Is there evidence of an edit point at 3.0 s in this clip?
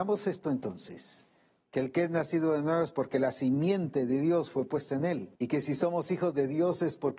no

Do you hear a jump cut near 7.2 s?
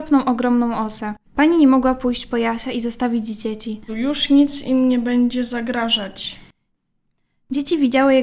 no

